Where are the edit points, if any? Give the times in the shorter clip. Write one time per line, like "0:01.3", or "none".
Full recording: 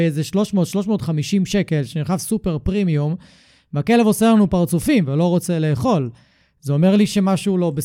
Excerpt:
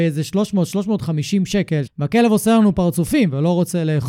0:01.9